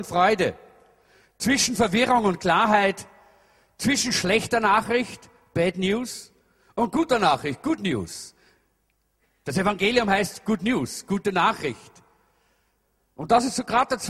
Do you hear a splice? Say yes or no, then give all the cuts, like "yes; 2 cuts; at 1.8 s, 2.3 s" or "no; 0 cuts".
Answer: no; 0 cuts